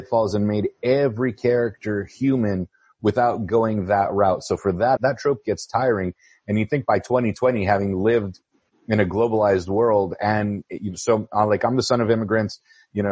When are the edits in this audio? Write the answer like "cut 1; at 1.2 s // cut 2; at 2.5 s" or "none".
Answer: cut 1; at 5.0 s